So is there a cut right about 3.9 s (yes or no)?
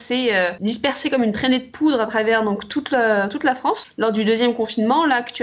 no